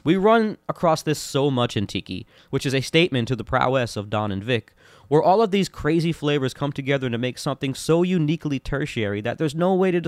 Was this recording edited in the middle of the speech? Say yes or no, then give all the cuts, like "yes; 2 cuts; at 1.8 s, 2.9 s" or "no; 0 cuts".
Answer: no; 0 cuts